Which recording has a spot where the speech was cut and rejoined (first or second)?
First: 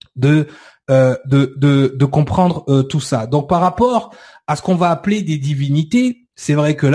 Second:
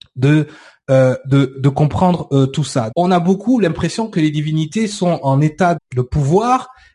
second